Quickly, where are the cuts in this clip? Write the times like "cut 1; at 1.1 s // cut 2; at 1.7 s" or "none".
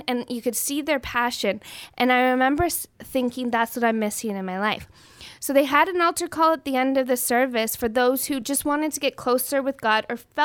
none